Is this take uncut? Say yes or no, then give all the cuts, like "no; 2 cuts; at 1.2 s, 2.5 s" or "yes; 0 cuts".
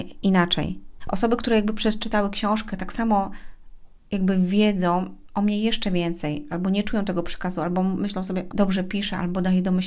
no; 3 cuts; at 1.0 s, 6.5 s, 8.5 s